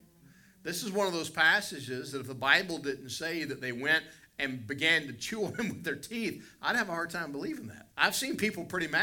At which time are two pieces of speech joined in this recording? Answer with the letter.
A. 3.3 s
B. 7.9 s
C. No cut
B